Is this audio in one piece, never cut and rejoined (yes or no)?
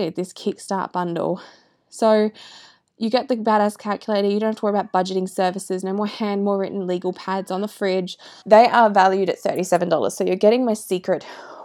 no